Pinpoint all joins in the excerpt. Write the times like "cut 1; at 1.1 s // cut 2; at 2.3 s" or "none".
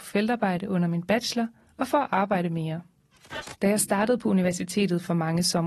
cut 1; at 3.5 s